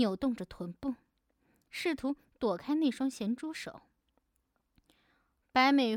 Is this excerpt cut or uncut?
uncut